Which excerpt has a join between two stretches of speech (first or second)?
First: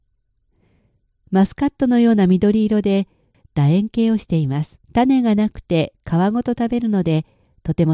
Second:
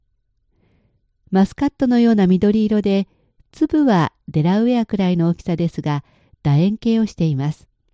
first